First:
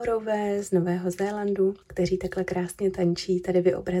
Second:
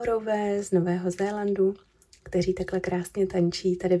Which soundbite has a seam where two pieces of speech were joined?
first; 1 cut; at 1.8 s

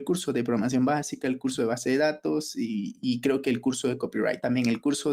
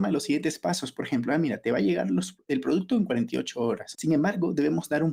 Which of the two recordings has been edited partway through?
second; 1 cut; at 3.9 s

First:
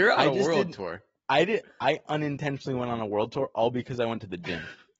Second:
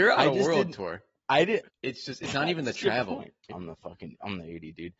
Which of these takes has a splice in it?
second; 2 cuts; at 1.7 s, 3.5 s

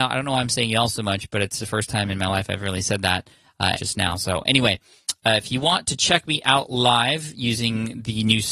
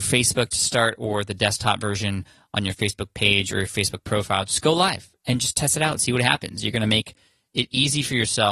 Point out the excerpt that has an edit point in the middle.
first; 1 cut; at 3.7 s

